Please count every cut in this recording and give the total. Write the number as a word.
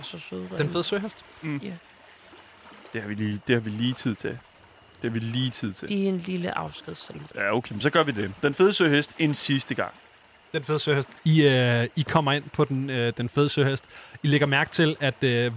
one